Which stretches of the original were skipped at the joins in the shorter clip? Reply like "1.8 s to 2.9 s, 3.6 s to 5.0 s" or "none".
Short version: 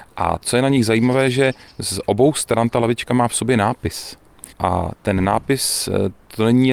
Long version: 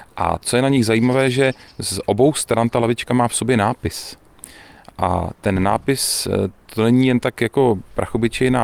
4.5 s to 4.9 s